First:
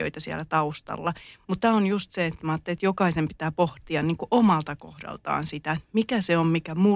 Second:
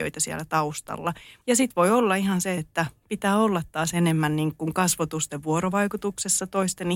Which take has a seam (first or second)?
second